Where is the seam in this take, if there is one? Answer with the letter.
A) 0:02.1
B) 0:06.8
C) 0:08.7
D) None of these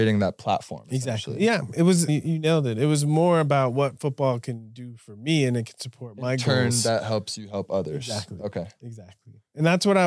A